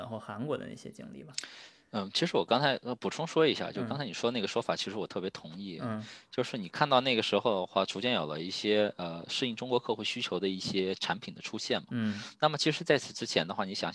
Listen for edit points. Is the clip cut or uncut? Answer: uncut